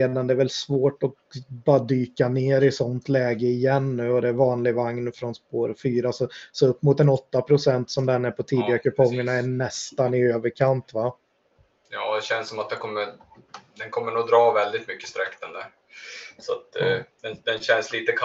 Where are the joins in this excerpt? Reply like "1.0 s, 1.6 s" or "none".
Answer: none